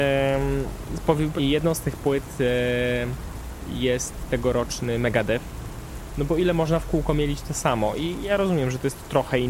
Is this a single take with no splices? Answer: no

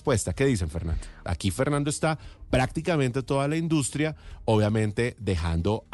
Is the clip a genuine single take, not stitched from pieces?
no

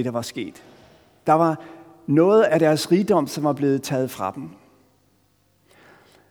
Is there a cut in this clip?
no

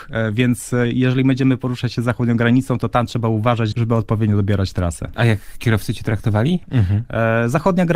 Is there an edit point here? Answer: yes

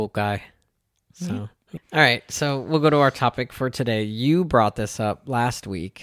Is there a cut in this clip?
yes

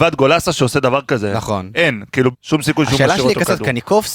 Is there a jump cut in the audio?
yes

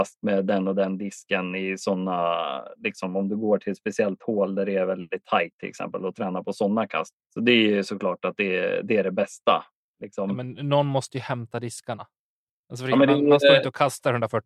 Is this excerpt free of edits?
no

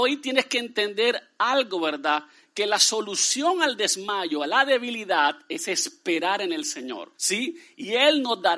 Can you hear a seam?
yes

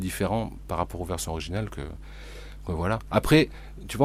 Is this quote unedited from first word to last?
yes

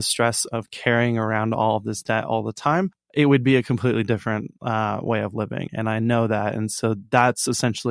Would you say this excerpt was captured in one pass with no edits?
yes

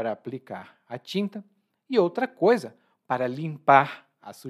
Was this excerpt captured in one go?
yes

